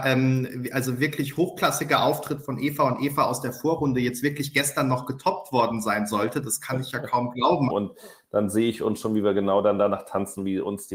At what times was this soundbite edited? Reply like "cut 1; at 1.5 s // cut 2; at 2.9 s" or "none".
cut 1; at 7.7 s